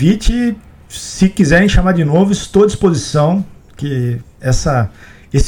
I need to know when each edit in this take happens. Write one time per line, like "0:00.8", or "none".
none